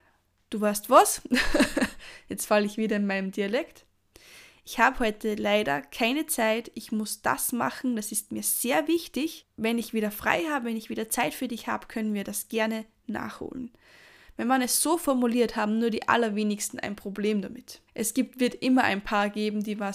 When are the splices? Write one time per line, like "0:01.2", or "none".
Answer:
0:17.9